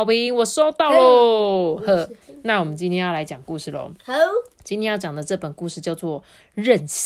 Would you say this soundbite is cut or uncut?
uncut